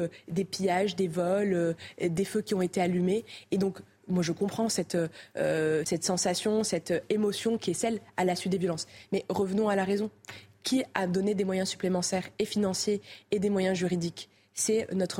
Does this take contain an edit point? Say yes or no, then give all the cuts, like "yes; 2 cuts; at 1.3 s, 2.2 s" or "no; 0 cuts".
yes; 1 cut; at 5.8 s